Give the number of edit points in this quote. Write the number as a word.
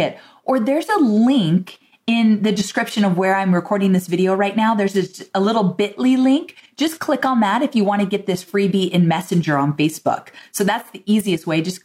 zero